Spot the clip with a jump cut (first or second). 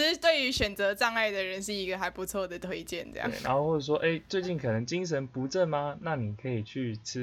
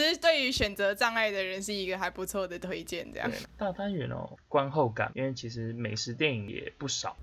second